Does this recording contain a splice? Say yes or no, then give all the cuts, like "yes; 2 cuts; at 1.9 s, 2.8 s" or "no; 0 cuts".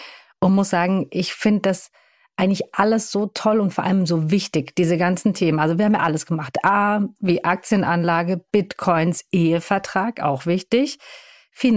no; 0 cuts